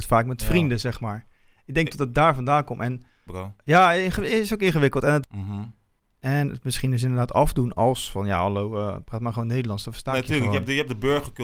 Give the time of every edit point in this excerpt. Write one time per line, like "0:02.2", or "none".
0:03.3
0:05.2